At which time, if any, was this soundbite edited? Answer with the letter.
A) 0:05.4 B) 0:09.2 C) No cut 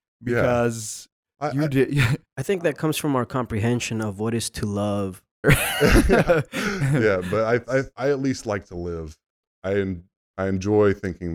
A